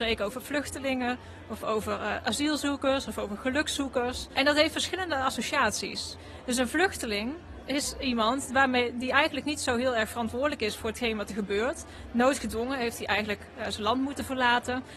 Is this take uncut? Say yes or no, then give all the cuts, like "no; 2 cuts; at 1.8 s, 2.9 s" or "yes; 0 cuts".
yes; 0 cuts